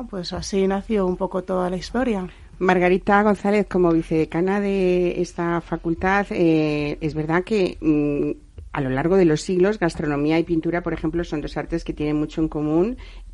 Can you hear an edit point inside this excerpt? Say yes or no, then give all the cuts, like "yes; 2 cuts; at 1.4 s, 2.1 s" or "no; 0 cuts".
no; 0 cuts